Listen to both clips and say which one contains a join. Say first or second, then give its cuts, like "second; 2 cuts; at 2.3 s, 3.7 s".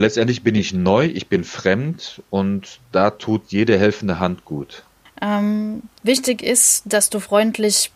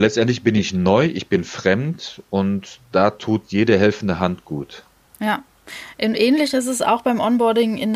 first; 1 cut; at 5.1 s